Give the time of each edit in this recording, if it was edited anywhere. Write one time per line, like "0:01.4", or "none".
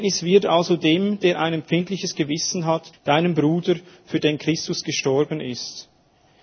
0:02.9